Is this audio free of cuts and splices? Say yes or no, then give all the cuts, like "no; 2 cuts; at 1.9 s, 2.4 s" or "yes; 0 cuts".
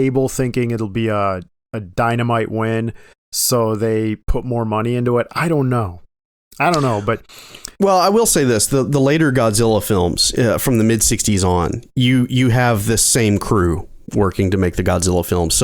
yes; 0 cuts